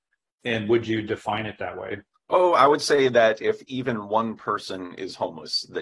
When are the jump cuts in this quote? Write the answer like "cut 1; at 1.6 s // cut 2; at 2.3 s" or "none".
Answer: cut 1; at 2.1 s